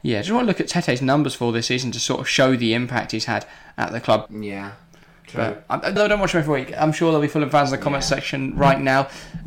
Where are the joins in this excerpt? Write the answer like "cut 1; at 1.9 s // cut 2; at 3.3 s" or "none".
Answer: cut 1; at 4.3 s // cut 2; at 6.0 s